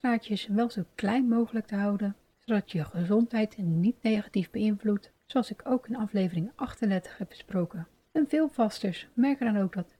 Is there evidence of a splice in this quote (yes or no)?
yes